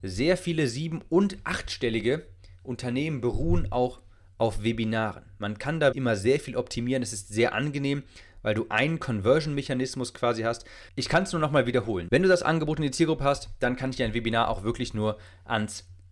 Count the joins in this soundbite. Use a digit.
3